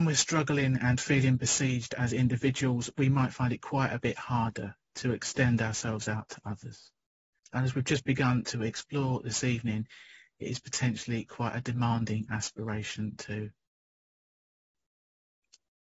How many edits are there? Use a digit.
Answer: 1